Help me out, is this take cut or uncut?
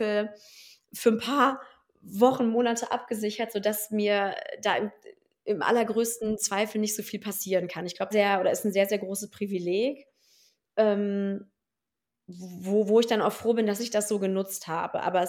cut